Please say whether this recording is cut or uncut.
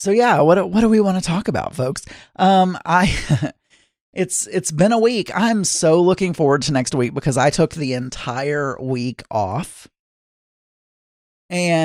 uncut